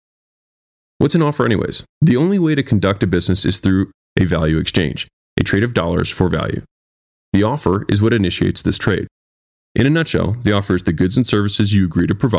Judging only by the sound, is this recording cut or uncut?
cut